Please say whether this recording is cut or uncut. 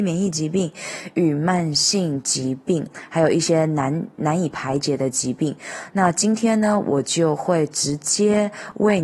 uncut